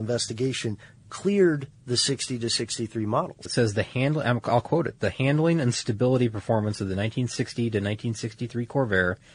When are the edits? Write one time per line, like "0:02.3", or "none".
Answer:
0:03.4